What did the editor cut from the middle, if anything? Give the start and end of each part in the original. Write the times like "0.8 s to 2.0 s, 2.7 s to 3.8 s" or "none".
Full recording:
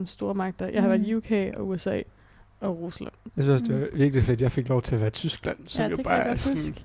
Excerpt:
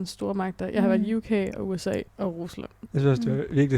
2.1 s to 2.5 s